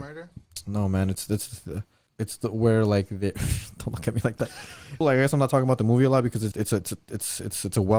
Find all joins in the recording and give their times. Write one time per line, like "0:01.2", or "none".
0:02.1
0:05.0
0:06.5

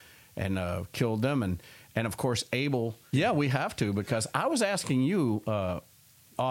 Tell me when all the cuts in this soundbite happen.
0:03.1

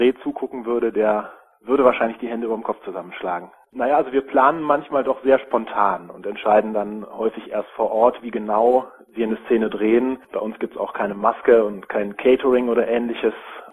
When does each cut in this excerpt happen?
0:03.7

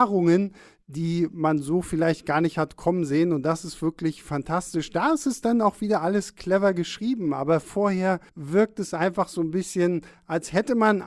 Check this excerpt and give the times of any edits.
0:08.3

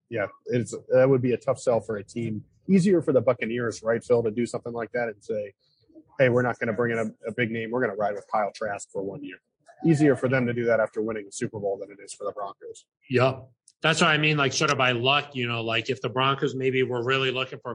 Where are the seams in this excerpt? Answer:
none

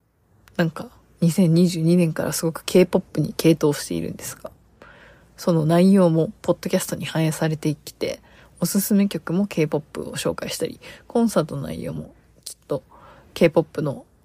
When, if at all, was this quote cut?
none

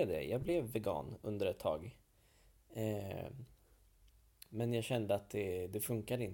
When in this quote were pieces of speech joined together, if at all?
none

